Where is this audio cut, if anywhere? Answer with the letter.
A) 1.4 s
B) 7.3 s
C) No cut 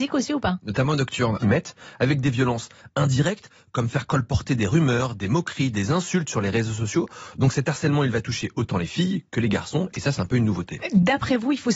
A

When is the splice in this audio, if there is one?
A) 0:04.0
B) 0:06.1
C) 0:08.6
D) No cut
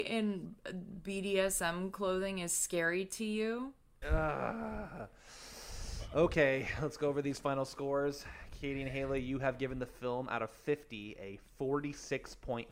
A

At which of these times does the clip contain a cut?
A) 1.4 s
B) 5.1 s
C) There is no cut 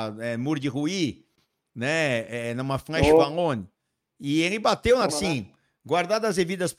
B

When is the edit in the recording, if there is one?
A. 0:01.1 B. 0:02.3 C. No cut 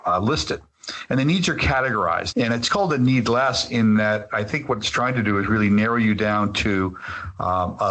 B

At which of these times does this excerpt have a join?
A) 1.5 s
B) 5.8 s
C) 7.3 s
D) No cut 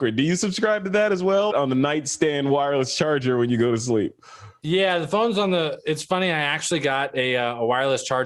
A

